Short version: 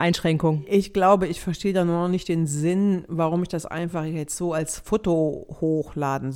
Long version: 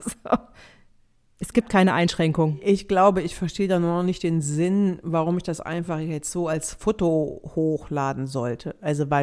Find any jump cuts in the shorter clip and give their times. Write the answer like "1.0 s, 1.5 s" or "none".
none